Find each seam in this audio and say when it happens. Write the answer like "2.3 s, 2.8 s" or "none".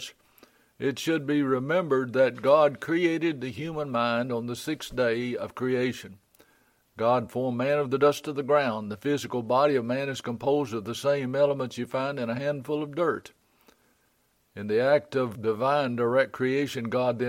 none